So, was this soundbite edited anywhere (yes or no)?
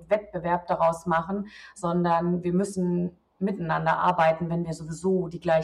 no